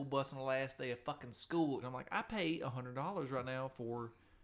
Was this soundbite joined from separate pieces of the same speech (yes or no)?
yes